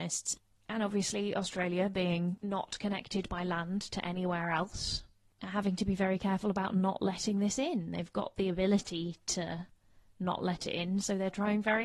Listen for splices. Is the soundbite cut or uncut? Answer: uncut